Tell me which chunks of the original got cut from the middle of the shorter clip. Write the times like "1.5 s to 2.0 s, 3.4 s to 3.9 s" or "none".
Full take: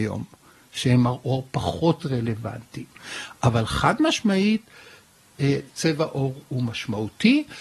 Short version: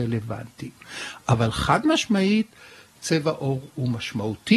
5.1 s to 5.7 s